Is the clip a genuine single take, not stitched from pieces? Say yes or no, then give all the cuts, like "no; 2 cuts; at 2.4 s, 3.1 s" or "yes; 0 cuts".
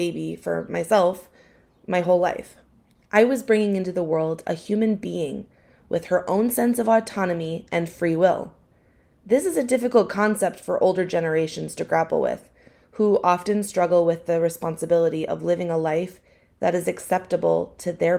yes; 0 cuts